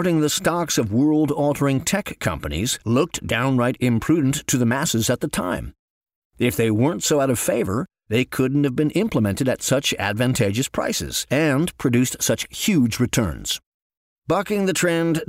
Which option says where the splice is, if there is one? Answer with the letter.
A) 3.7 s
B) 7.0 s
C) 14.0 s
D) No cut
D